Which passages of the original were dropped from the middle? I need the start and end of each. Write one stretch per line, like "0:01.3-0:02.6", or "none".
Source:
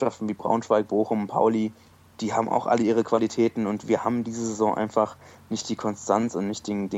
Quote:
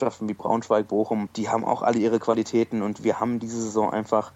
0:01.3-0:02.1